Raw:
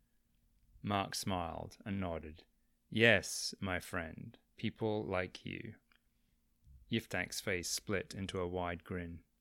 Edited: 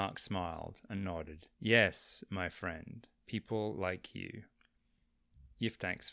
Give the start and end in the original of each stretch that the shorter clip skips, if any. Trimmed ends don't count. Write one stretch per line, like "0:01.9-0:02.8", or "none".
0:02.5-0:02.8